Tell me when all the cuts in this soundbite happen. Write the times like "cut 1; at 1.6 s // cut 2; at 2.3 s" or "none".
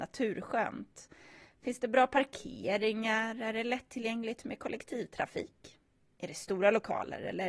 none

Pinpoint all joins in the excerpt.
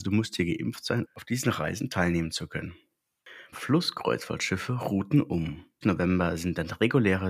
cut 1; at 1.0 s // cut 2; at 3.5 s // cut 3; at 5.8 s

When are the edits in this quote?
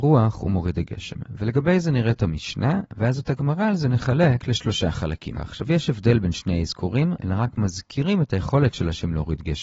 cut 1; at 5.3 s // cut 2; at 7.2 s

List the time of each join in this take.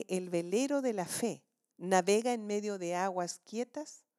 none

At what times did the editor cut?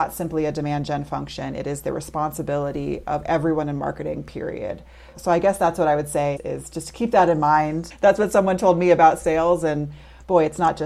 none

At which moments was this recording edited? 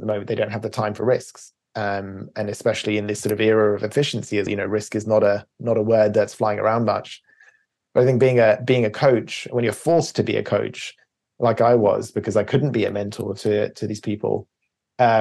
cut 1; at 4.5 s

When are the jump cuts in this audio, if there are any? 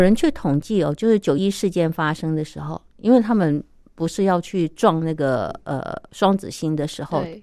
cut 1; at 1.4 s

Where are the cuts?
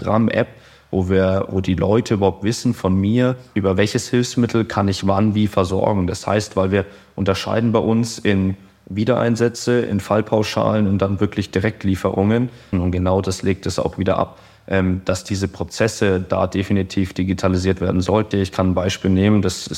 cut 1; at 12.7 s // cut 2; at 18.3 s

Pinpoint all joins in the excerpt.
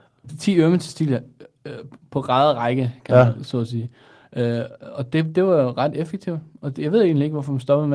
none

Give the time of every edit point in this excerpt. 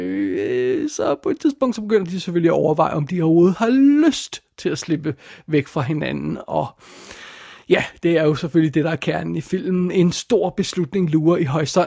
none

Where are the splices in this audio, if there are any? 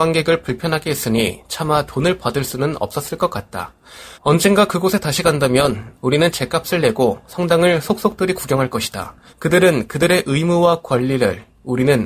cut 1; at 4.1 s // cut 2; at 9.3 s

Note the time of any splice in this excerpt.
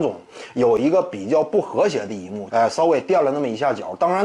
cut 1; at 2.5 s

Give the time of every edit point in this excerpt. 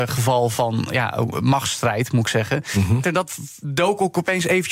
cut 1; at 3.0 s

